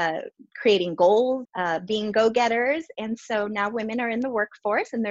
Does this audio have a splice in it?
yes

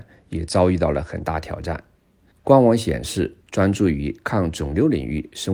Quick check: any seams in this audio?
yes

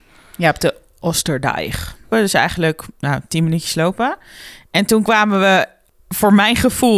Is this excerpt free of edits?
no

